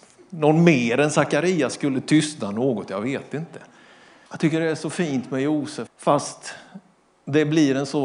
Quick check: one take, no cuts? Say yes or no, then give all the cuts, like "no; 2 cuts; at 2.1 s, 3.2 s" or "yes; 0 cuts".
no; 2 cuts; at 4.3 s, 5.9 s